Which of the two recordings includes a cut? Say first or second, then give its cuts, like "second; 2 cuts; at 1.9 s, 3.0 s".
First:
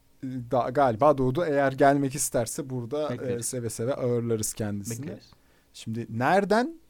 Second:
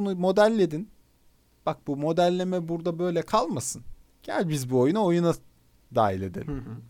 first; 1 cut; at 5.7 s